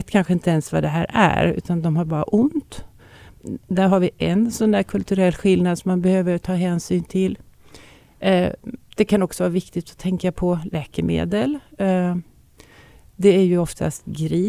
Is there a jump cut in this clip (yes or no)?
no